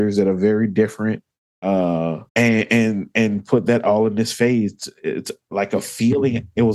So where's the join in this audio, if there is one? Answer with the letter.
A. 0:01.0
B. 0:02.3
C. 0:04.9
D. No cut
B